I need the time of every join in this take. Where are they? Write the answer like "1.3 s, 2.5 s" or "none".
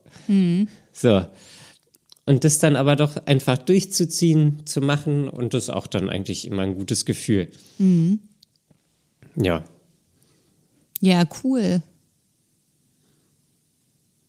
none